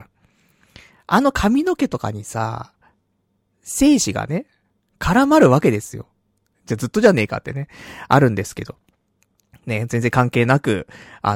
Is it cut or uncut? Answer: cut